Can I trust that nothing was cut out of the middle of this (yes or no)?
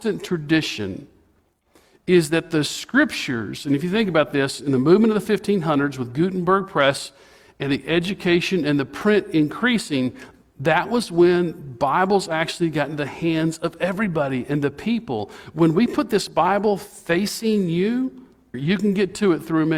no